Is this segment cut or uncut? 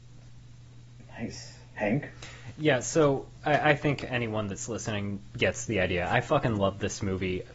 uncut